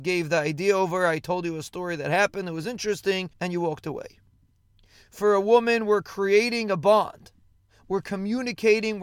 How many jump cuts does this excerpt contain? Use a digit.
1